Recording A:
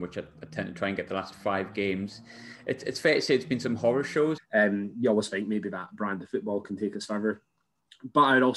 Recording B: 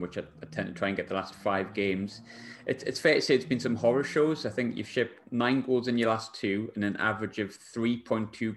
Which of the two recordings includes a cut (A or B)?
A